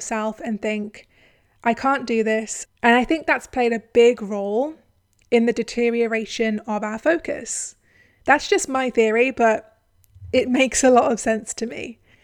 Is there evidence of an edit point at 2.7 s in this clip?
yes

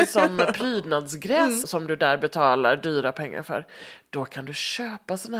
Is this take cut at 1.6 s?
yes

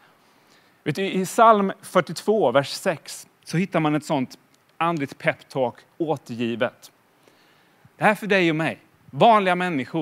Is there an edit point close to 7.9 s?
yes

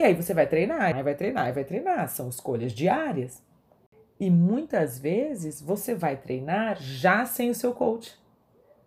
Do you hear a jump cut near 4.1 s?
no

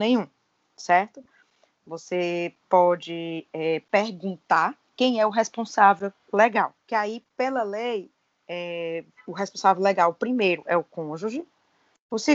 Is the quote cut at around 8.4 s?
no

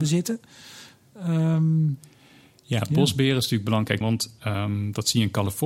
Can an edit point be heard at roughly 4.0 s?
yes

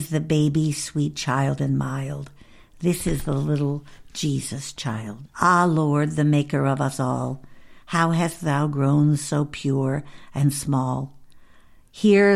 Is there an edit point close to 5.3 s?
yes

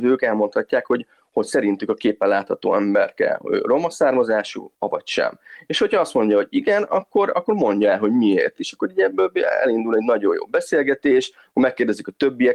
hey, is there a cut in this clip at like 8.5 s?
no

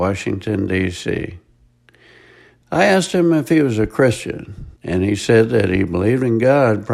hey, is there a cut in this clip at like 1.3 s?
no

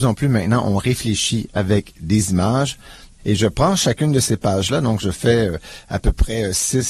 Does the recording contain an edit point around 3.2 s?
yes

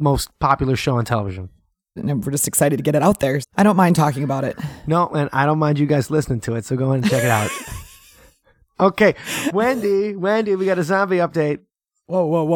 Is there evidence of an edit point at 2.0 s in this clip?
yes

